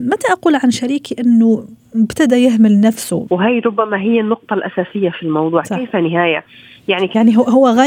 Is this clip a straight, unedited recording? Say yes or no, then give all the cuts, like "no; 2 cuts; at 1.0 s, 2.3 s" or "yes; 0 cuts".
no; 1 cut; at 3.3 s